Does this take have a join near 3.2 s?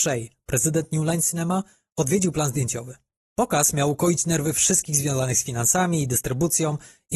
no; 0 cuts

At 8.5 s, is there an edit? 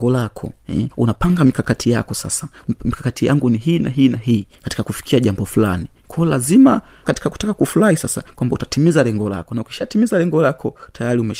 no; 1 cut; at 0.9 s

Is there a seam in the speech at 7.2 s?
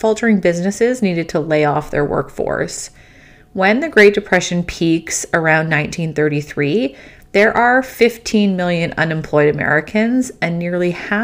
no; 0 cuts

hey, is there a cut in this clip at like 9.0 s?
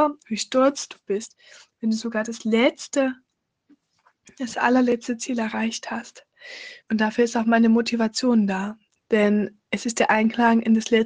yes; 2 cuts; at 6.8 s, 9.0 s

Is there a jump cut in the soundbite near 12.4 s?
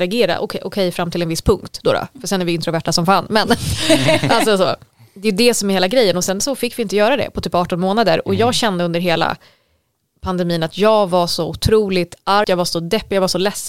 yes; 1 cut; at 12.4 s

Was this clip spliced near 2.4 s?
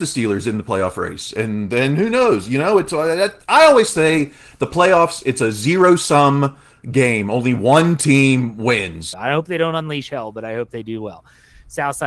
no; 1 cut; at 9.1 s

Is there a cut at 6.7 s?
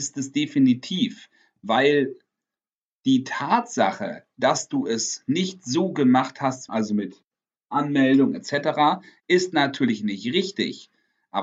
yes; 1 cut; at 6.7 s

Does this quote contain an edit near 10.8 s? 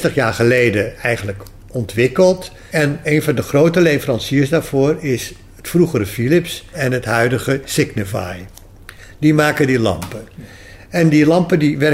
no; 2 cuts; at 3.0 s, 6.7 s

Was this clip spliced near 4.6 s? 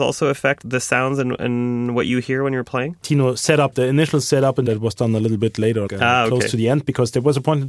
no; 2 cuts; at 3.0 s, 5.9 s

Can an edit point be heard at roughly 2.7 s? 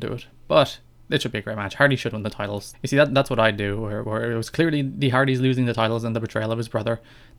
yes; 1 cut; at 2.7 s

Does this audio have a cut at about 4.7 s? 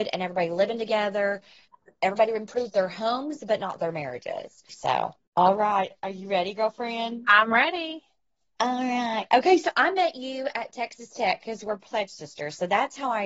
yes; 1 cut; at 4.7 s

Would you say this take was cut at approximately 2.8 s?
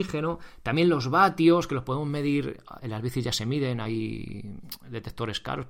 yes; 1 cut; at 2.8 s

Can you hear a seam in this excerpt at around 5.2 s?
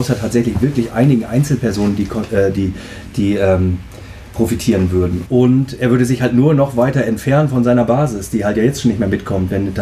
yes; 1 cut; at 5.2 s

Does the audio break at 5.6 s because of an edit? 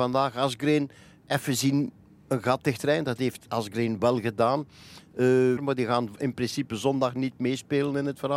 yes; 2 cuts; at 4.0 s, 5.6 s

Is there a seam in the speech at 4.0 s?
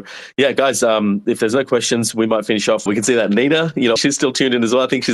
yes; 2 cuts; at 2.9 s, 4.0 s

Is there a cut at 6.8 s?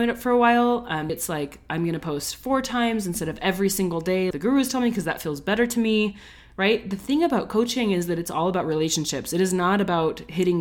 no; 2 cuts; at 1.1 s, 4.3 s

